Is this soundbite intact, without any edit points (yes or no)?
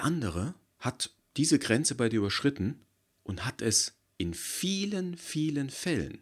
yes